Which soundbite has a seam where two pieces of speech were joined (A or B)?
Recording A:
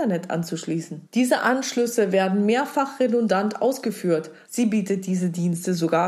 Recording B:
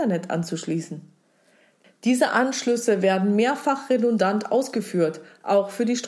A